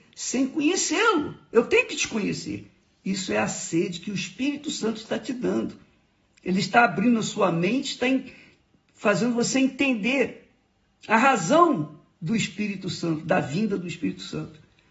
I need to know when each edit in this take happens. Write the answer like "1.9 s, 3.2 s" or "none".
none

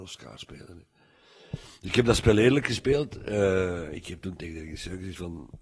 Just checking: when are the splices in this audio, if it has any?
none

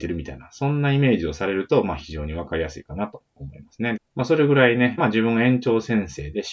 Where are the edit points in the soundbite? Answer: 4.0 s, 5.0 s

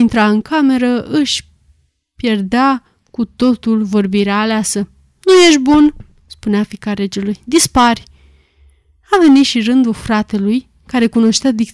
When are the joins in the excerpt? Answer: none

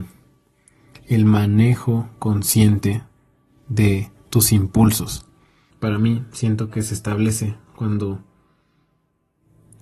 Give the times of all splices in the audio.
5.7 s

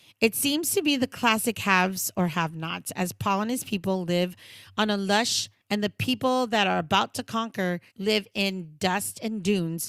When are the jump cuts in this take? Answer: 5.6 s, 7.9 s

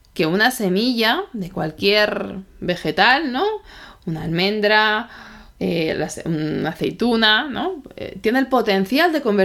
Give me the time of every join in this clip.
none

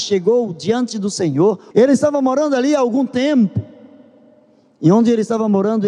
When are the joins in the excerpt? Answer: 1.7 s

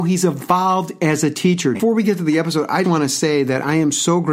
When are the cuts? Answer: 1.7 s, 2.8 s

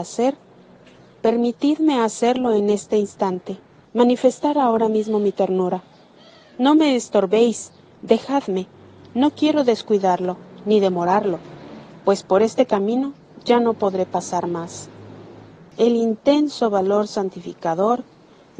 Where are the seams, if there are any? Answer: none

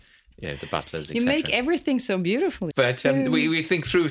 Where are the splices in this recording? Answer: 2.7 s

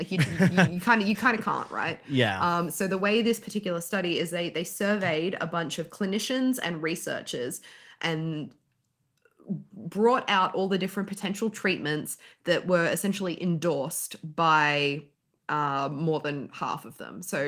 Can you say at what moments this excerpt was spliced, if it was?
none

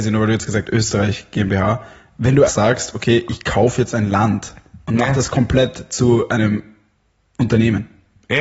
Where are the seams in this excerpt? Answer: 2.5 s

